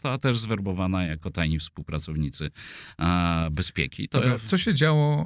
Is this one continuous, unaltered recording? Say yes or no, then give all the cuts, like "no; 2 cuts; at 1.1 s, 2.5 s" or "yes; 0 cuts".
yes; 0 cuts